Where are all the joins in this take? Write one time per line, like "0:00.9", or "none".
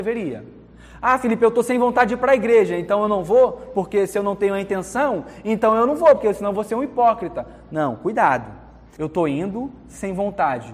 0:09.0